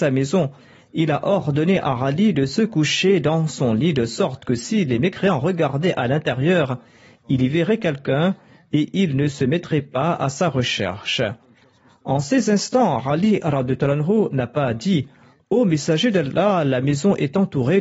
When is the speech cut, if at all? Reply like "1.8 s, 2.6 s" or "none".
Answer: none

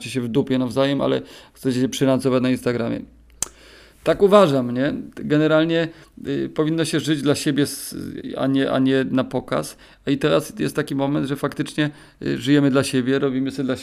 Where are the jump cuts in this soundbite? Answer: none

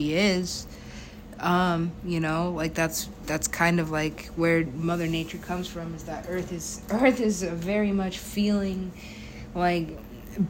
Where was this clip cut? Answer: none

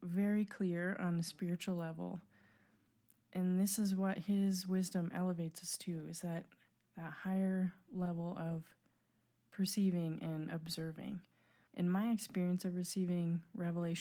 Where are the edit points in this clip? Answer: 11.7 s

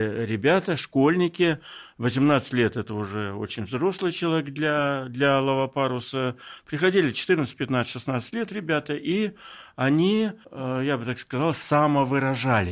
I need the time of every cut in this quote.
10.4 s

